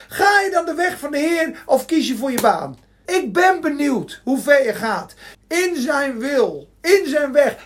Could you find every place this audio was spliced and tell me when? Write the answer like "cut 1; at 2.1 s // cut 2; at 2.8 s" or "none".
cut 1; at 3.1 s // cut 2; at 5.3 s